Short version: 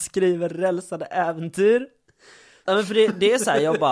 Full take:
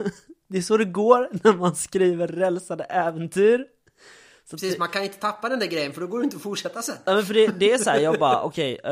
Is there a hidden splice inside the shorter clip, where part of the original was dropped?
yes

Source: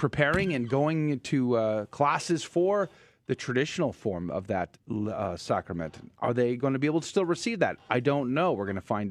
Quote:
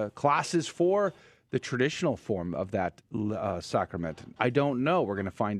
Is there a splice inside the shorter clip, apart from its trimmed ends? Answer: yes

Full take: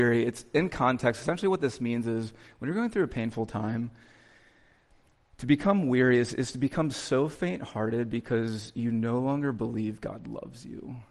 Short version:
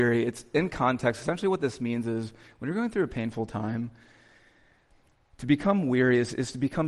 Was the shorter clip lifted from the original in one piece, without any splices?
yes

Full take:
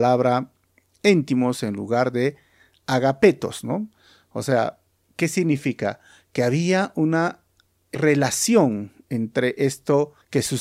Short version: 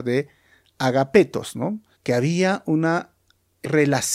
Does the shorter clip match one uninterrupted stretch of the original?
no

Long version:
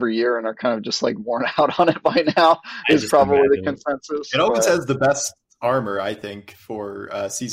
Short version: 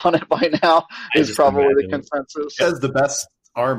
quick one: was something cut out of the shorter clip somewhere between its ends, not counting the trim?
yes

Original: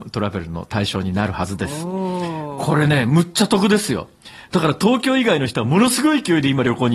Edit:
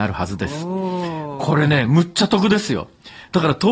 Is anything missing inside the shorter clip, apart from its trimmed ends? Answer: no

